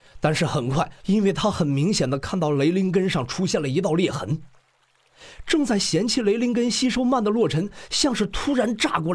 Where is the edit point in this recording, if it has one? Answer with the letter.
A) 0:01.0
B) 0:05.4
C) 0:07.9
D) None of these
A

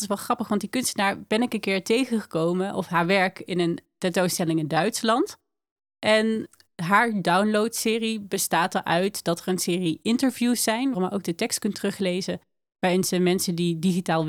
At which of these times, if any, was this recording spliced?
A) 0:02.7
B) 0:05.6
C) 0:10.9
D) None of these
C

